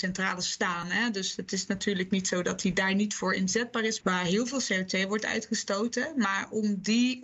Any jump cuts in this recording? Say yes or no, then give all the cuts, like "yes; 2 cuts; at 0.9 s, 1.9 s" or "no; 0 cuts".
yes; 1 cut; at 4.0 s